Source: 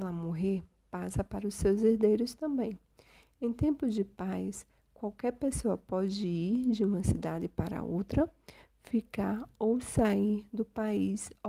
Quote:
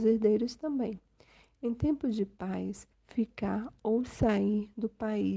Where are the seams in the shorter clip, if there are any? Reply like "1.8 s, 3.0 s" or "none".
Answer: 2.9 s